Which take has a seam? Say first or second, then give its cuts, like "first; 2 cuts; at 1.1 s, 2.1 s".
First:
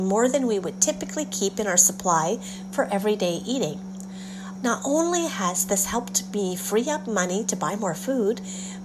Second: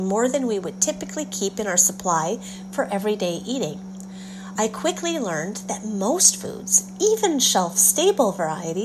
first; 1 cut; at 4.6 s